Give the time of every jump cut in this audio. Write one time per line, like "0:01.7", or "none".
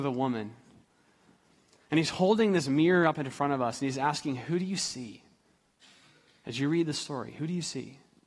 none